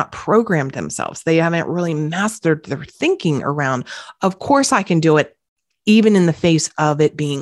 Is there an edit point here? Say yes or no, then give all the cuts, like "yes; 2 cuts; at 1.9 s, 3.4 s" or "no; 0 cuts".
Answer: no; 0 cuts